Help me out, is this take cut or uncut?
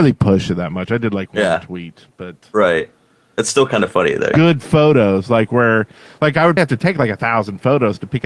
cut